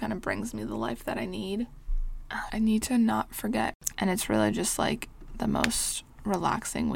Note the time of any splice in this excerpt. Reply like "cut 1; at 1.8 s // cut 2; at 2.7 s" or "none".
cut 1; at 2.5 s // cut 2; at 3.9 s